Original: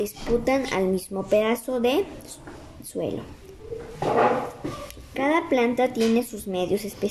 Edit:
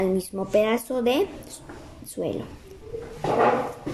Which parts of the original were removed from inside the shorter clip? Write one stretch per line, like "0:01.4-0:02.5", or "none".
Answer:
none